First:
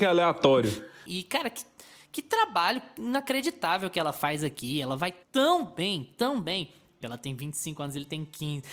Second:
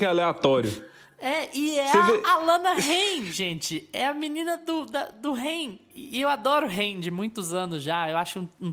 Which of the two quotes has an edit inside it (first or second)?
first